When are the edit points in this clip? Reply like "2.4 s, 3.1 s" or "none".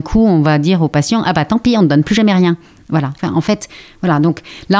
3.2 s